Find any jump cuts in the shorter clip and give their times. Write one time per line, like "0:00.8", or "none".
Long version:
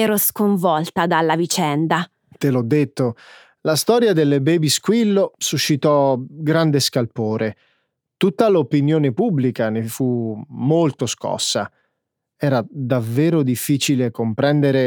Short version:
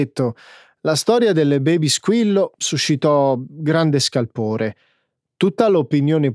none